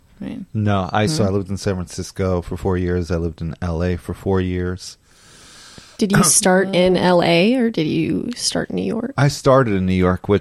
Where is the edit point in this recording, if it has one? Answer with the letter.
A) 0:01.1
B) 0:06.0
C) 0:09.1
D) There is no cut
A